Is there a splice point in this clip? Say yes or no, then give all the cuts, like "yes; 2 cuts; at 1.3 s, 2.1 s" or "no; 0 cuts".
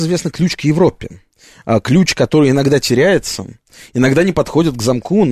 no; 0 cuts